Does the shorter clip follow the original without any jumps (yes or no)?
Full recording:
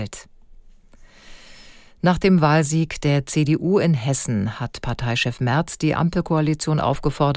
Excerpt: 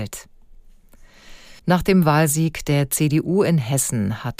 no